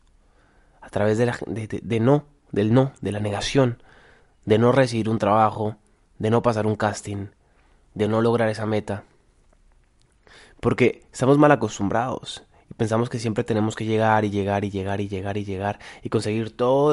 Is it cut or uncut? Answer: uncut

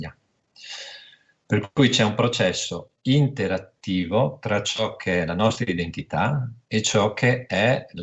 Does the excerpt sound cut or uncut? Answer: uncut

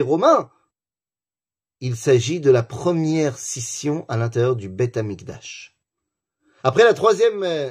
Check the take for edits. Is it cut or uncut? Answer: cut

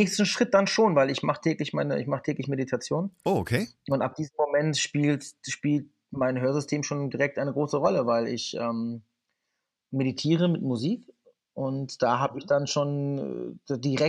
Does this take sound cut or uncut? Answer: uncut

